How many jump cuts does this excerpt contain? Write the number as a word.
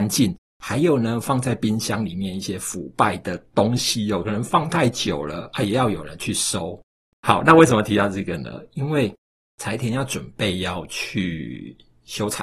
one